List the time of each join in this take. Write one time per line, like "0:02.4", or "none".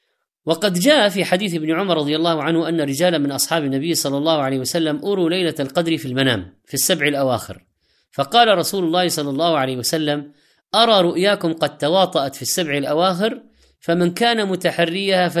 none